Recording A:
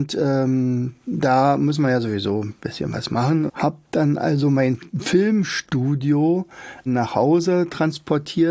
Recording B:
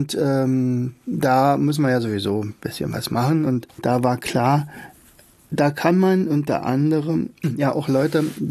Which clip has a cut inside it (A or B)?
A